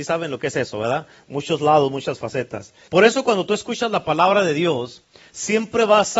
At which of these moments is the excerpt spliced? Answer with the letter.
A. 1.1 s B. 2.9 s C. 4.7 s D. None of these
B